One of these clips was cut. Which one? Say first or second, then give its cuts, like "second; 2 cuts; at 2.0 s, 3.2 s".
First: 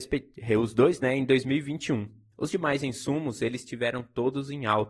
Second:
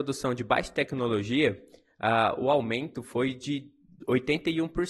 first; 1 cut; at 2.3 s